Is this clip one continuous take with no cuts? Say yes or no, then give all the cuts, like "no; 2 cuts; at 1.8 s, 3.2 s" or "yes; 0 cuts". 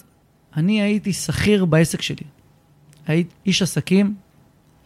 no; 1 cut; at 3.3 s